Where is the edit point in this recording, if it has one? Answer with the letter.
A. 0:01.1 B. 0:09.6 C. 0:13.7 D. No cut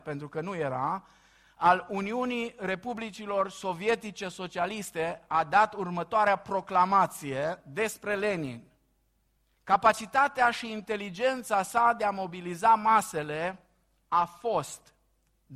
B